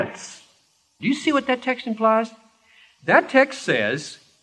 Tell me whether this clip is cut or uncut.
cut